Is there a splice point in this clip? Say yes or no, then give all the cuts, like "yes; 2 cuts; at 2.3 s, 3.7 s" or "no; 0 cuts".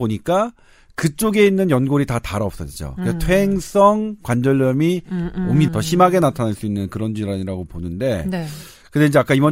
yes; 1 cut; at 5.7 s